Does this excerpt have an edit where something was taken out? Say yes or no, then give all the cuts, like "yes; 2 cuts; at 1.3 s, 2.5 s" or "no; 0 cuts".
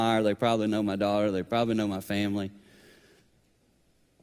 no; 0 cuts